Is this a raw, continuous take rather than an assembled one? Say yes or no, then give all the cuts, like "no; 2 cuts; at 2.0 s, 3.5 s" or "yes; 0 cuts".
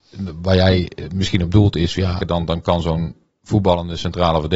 no; 1 cut; at 2.2 s